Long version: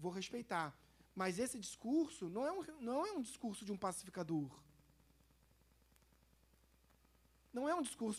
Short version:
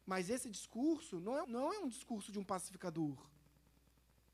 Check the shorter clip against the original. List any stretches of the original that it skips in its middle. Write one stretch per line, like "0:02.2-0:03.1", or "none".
0:02.5-0:02.8

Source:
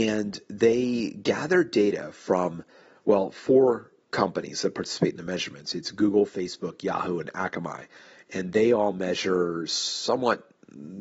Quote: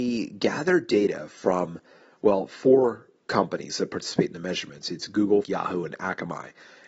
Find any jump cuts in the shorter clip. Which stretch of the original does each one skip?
0:06.3-0:06.8

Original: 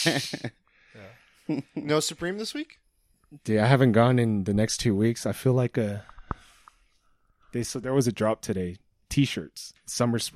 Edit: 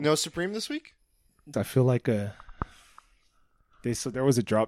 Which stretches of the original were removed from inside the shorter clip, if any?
0:03.4-0:05.2

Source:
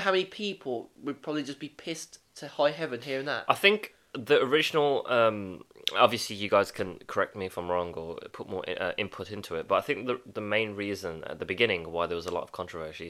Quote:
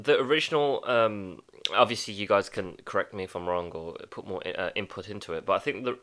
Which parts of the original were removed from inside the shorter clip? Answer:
none

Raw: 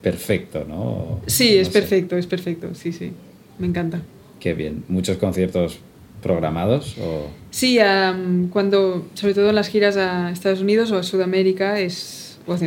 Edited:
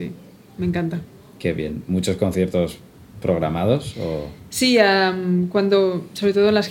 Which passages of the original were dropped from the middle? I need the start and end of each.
none

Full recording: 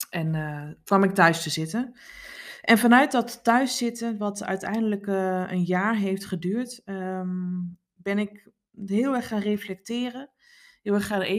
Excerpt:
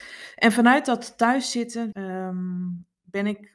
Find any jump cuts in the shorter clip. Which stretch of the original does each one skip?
0:04.2-0:06.8

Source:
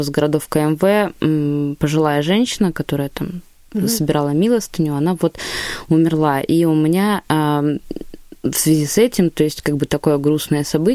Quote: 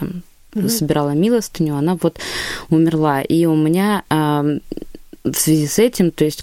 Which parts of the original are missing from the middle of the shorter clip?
none

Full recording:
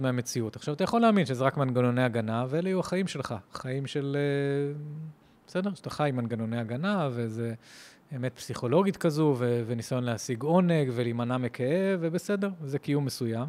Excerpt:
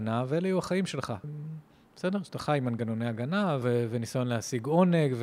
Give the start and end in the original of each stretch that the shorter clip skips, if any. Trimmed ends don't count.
0:03.5-0:04.8
0:07.1-0:09.4

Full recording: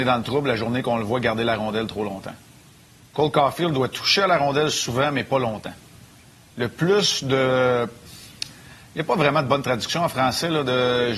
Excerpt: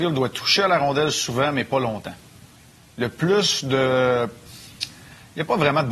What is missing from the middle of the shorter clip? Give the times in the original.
none

